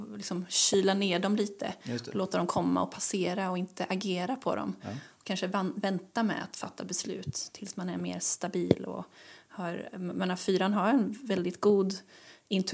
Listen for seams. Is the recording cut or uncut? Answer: uncut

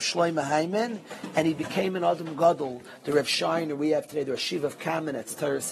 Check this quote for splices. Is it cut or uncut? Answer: uncut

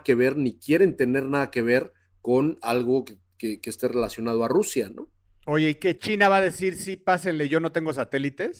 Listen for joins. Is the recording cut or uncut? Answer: uncut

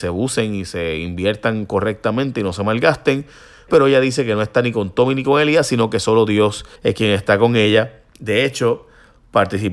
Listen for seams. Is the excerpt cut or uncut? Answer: cut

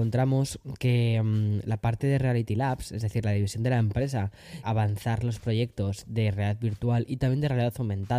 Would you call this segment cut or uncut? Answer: cut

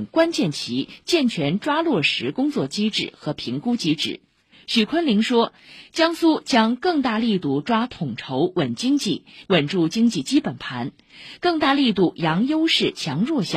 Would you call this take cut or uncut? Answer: cut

